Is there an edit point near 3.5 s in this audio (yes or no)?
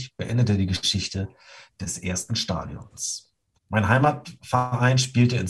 yes